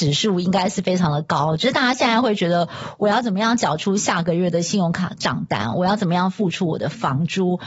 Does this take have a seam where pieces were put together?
no; 0 cuts

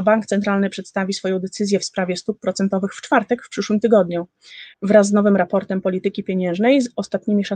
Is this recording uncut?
no; 1 cut; at 4.7 s

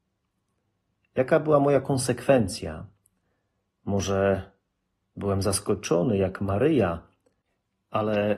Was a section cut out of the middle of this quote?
no; 0 cuts

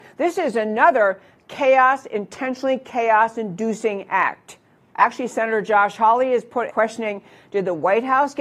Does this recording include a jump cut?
yes; 2 cuts; at 4.9 s, 6.7 s

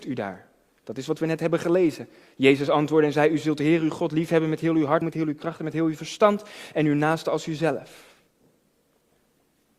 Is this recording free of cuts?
no; 1 cut; at 5.0 s

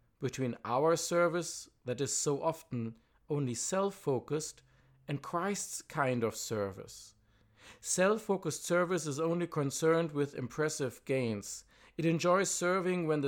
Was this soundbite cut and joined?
no; 0 cuts

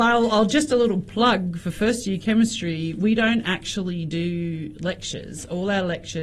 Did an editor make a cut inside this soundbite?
no; 0 cuts

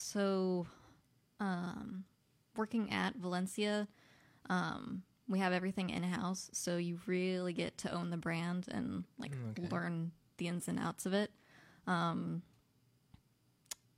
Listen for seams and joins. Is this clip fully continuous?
yes; 0 cuts

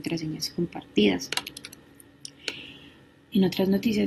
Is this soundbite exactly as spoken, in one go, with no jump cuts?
yes; 0 cuts

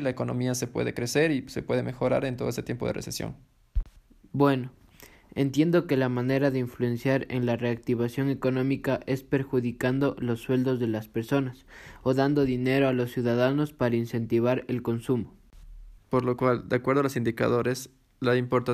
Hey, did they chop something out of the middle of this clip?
yes; 1 cut; at 16.0 s

